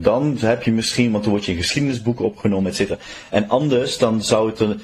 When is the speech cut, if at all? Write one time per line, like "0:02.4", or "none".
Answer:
none